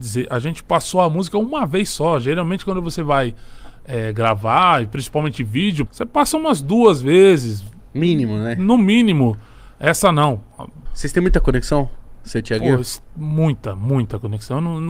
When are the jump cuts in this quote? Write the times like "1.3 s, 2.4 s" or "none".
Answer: 5.9 s, 10.9 s